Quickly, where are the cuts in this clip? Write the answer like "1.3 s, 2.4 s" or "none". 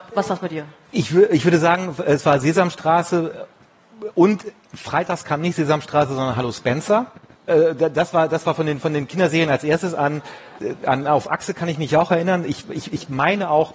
none